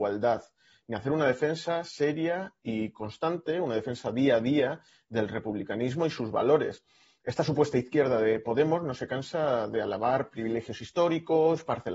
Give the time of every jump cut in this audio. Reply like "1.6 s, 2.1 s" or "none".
none